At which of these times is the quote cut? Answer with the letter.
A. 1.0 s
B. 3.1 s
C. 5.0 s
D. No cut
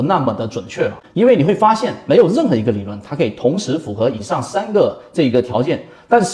A